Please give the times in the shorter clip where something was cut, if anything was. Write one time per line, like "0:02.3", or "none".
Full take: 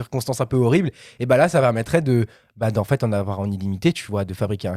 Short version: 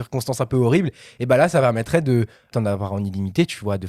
0:02.5